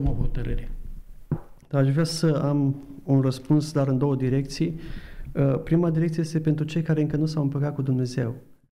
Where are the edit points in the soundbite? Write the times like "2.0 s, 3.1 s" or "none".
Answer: none